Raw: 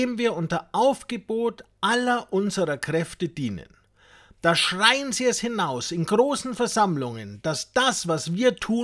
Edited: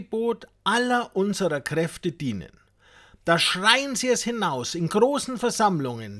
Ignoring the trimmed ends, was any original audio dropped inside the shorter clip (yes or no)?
no